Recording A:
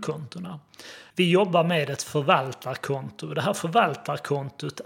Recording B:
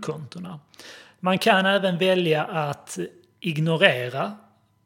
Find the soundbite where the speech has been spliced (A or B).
A